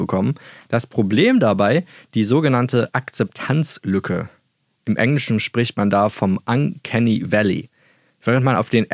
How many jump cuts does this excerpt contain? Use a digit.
0